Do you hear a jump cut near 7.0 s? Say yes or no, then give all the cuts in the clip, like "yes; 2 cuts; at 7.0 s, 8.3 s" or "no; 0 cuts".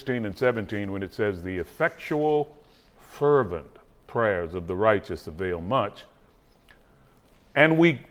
no; 0 cuts